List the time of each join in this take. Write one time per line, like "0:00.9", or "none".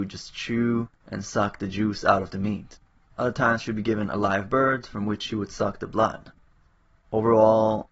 none